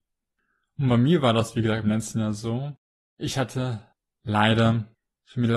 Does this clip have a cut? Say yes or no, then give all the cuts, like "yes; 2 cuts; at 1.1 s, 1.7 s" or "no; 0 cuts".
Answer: no; 0 cuts